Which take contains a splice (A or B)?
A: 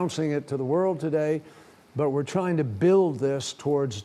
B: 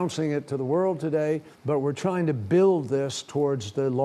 B